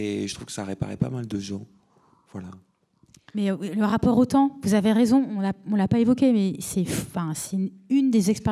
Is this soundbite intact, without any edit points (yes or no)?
yes